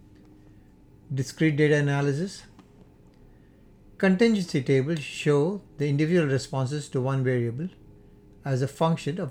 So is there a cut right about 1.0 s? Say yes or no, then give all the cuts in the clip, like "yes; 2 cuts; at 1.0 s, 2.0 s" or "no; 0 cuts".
no; 1 cut; at 5.7 s